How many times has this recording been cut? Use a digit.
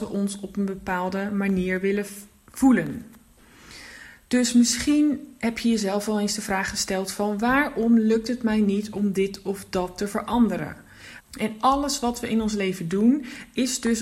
1